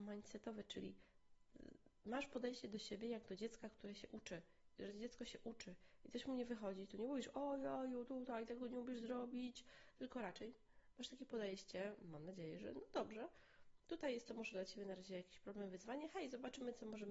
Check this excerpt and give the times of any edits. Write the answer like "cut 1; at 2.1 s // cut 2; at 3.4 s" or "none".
none